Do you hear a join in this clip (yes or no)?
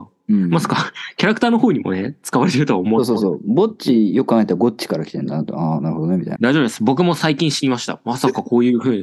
yes